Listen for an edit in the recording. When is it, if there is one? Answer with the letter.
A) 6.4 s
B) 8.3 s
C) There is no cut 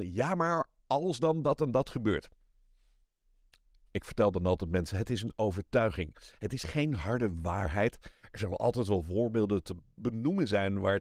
C